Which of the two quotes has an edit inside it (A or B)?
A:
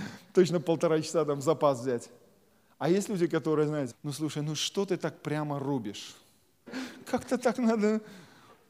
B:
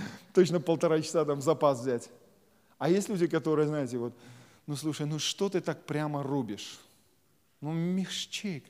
A